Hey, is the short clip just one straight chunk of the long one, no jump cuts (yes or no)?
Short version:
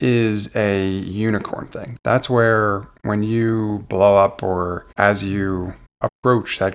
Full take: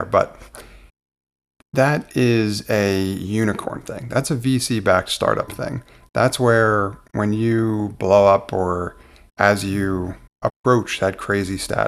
no